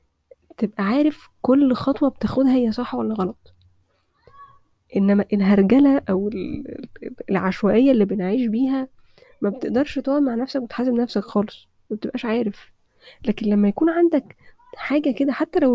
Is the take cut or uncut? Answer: uncut